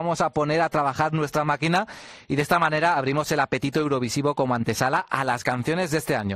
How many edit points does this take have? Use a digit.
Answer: 0